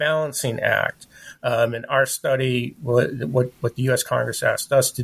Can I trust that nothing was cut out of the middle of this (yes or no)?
yes